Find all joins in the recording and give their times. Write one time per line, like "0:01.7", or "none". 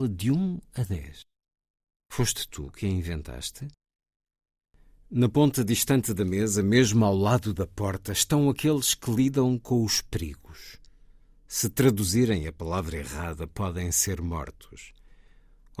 none